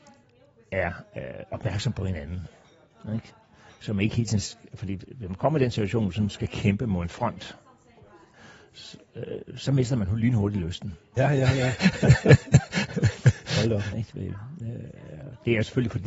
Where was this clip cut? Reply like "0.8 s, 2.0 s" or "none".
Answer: 11.2 s, 13.9 s

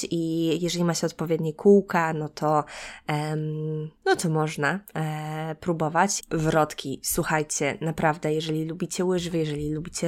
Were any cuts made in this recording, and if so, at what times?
4.0 s, 6.2 s

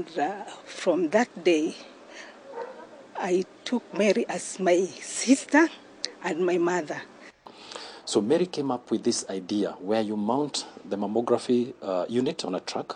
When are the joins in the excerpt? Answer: none

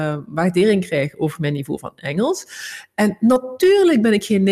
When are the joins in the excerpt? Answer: none

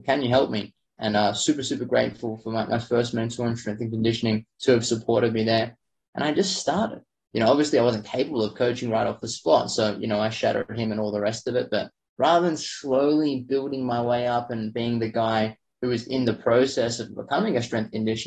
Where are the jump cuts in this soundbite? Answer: none

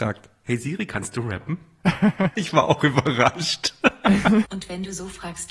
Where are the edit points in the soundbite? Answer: 2.3 s, 4.4 s

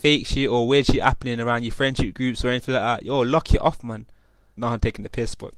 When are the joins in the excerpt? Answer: 4.6 s

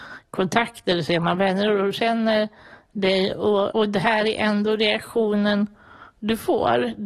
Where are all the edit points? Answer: 3.7 s

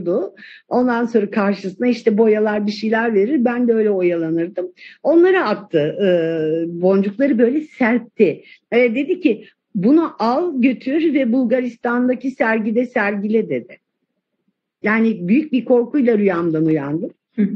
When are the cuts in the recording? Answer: 8.5 s, 14.7 s

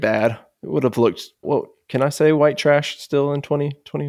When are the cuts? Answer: 1.4 s

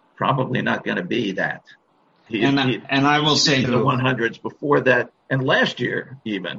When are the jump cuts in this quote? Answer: 2.3 s, 3.6 s, 5.2 s

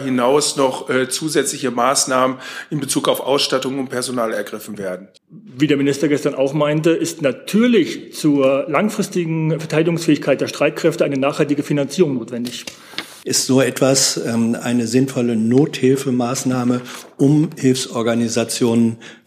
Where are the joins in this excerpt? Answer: 5.2 s, 13.2 s

